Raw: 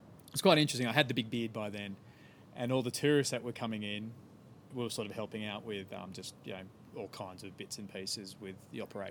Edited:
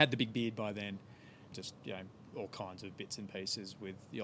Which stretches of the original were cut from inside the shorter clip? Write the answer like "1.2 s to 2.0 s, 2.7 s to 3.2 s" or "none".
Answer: 2.5 s to 6.1 s